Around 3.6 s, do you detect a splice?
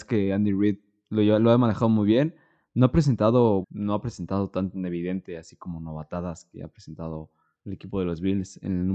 yes; 1 cut; at 3.6 s

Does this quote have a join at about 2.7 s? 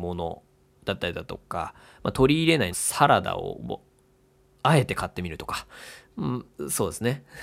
yes; 1 cut; at 2.7 s

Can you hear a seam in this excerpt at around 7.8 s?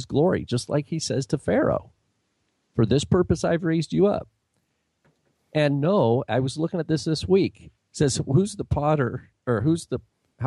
yes; 1 cut; at 7.8 s

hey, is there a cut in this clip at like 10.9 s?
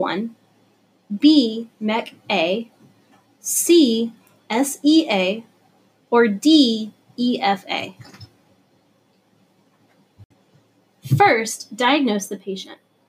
no; 0 cuts

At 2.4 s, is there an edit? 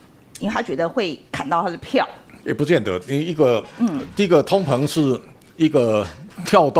yes; 1 cut; at 2.4 s

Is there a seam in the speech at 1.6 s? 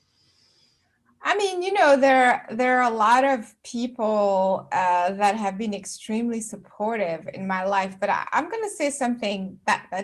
no; 0 cuts

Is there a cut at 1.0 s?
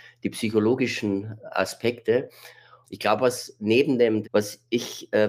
no; 2 cuts; at 2.8 s, 4.2 s

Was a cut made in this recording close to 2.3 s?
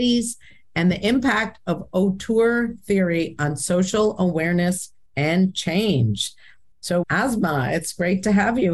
no; 1 cut; at 7.0 s

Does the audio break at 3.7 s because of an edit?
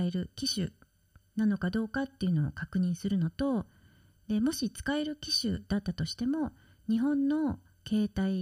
no; 0 cuts

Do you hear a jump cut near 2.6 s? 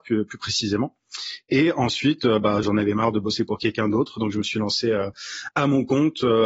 yes; 1 cut; at 2.6 s

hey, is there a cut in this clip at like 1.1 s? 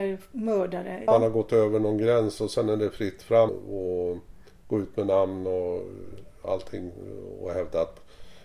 yes; 2 cuts; at 1.1 s, 3.5 s

